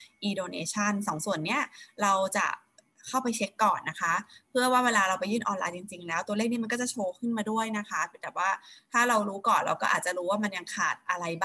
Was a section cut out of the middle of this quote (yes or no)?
no